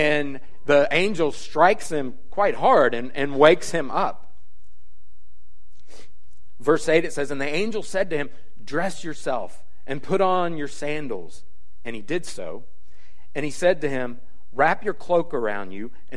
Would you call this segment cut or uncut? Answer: cut